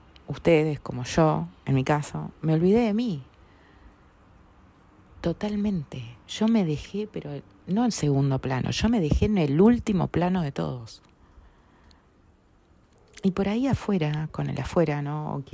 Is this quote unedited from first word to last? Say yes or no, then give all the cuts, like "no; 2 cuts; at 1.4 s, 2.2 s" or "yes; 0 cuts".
yes; 0 cuts